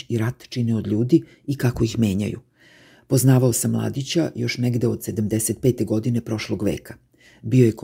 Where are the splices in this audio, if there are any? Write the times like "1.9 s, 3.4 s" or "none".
none